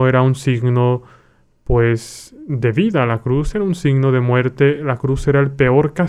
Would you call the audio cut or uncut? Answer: uncut